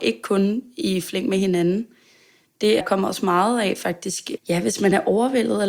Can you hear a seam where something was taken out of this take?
yes; 2 cuts; at 2.8 s, 4.4 s

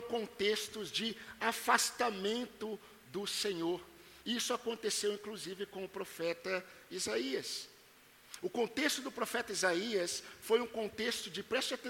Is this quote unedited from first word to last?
yes; 0 cuts

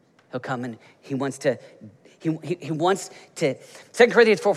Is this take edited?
no; 0 cuts

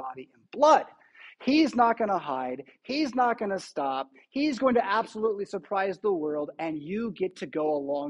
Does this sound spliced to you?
no; 0 cuts

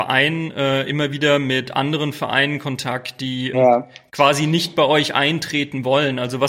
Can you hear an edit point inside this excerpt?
yes; 1 cut; at 3.5 s

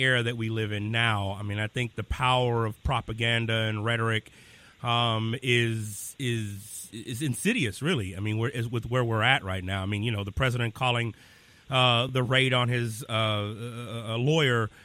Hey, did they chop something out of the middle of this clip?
no; 0 cuts

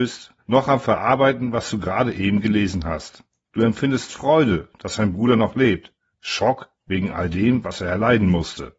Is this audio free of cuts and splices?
yes; 0 cuts

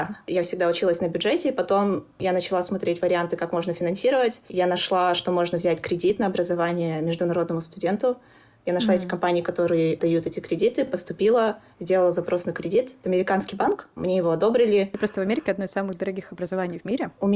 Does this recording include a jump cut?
no; 0 cuts

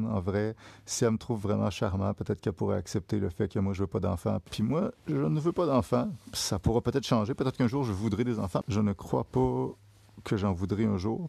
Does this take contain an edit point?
yes; 2 cuts; at 4.5 s, 8.6 s

